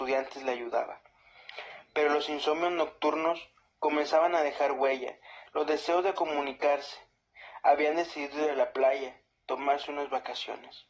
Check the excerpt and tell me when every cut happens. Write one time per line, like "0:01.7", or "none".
0:05.5